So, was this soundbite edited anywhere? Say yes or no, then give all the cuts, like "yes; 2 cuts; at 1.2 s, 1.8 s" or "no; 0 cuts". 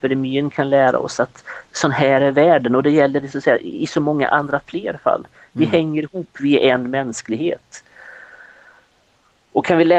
no; 0 cuts